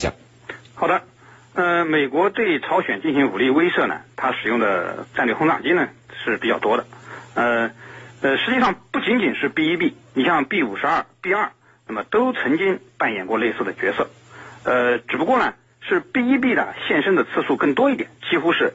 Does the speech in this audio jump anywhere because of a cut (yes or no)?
no